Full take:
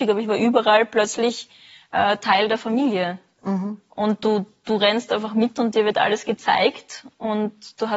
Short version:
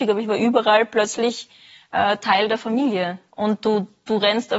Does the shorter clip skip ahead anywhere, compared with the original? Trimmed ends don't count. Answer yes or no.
yes